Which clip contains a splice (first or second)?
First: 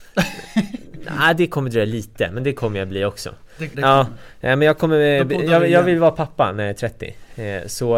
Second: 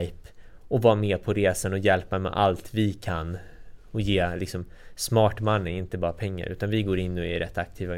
first